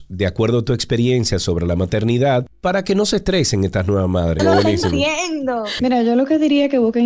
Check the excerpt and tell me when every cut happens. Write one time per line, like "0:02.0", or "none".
0:04.4
0:05.8